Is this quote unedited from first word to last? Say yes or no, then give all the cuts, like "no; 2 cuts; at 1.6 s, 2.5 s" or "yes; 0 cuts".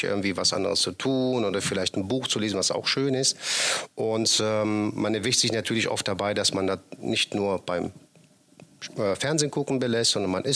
yes; 0 cuts